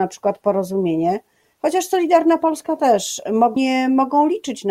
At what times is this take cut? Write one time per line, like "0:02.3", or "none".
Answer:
0:03.6